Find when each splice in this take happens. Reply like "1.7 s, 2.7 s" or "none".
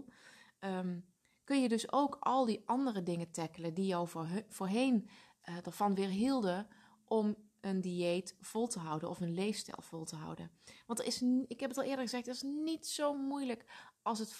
none

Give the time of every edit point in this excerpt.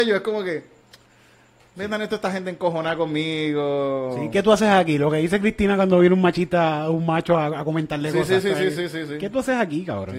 none

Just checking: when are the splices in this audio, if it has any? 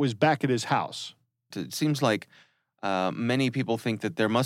1.5 s

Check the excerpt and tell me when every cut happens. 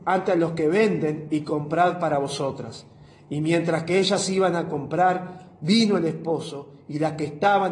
none

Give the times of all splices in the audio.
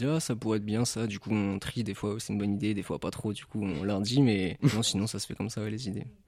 none

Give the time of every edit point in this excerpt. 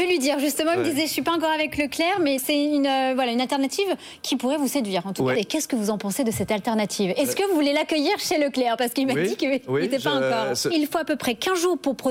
2.4 s, 5.3 s, 10.7 s

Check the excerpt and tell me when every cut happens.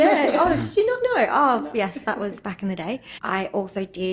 3.2 s

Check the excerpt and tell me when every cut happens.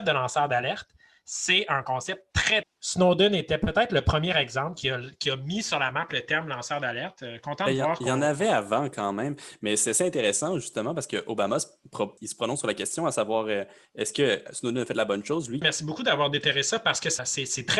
2.6 s, 15.6 s

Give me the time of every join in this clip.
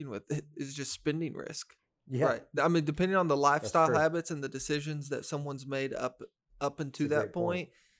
none

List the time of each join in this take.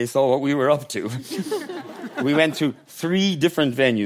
none

